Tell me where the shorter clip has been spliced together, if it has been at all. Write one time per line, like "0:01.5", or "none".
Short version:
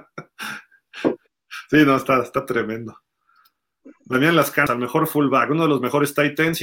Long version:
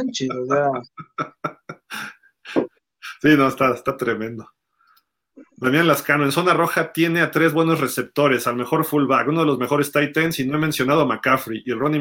0:04.7